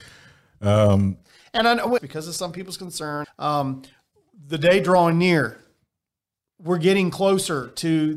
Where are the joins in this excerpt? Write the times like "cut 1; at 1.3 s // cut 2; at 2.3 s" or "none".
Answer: cut 1; at 2.0 s // cut 2; at 3.2 s